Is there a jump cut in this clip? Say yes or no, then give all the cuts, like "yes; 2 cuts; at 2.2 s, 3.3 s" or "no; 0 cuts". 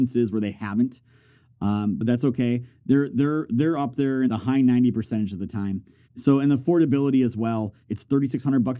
yes; 3 cuts; at 4.3 s, 6.0 s, 7.8 s